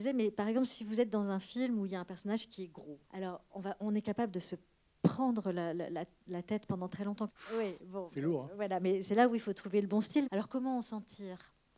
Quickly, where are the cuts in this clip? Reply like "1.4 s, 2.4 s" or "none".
3.0 s, 7.3 s, 10.2 s